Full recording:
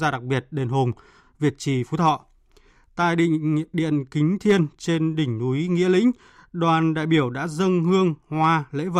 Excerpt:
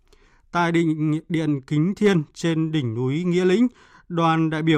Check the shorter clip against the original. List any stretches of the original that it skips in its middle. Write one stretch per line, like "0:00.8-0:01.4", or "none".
none